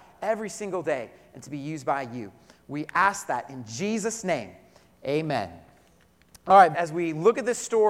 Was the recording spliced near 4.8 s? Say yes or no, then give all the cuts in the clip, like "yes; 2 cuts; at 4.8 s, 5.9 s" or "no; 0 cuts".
no; 1 cut; at 6.7 s